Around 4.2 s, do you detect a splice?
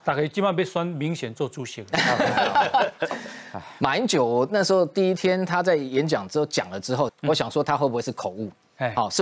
no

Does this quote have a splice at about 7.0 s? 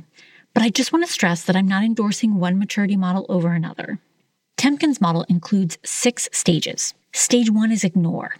yes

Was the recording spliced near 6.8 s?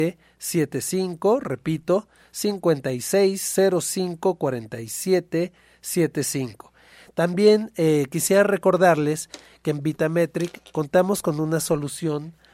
no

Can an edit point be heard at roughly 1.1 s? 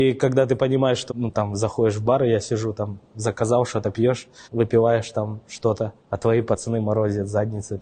yes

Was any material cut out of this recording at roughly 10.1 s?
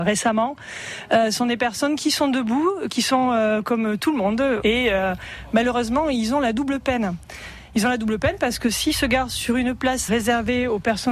yes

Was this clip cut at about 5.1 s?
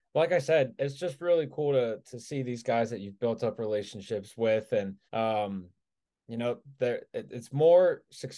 yes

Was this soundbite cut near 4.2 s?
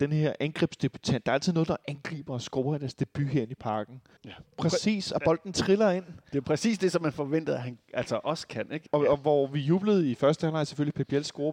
yes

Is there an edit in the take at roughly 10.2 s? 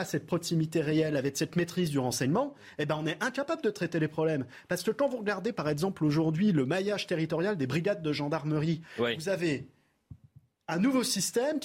no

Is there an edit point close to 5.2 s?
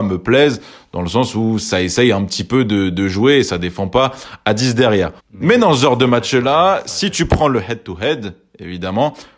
yes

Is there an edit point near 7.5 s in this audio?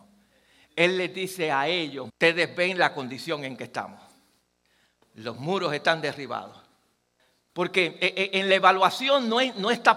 yes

